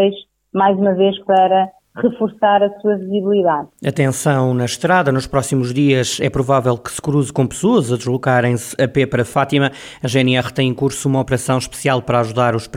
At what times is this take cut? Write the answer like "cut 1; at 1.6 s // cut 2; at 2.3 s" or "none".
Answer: none